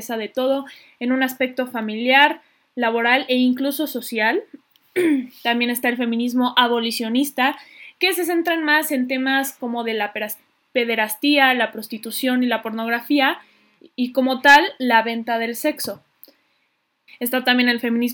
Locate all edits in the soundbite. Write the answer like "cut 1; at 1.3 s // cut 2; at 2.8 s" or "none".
cut 1; at 17.1 s